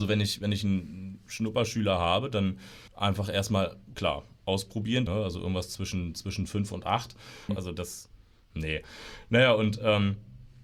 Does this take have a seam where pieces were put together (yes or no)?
yes